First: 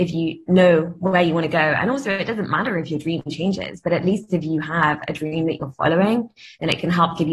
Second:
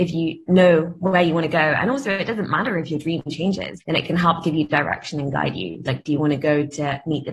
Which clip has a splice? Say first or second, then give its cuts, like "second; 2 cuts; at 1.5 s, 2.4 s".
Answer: second; 2 cuts; at 3.8 s, 5.9 s